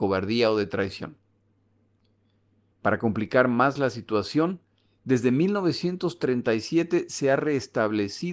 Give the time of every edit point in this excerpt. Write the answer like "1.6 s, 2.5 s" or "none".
2.7 s